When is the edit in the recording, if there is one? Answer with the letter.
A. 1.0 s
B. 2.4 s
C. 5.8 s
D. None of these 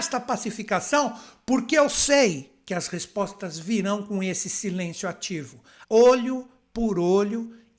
C